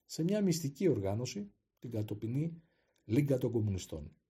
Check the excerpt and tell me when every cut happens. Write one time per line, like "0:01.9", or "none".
0:01.8